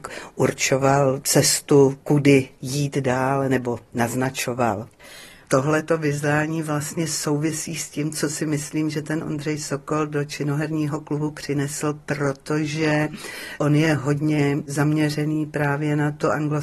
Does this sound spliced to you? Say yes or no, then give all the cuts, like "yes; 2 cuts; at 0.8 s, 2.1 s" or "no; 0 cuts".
yes; 1 cut; at 5.5 s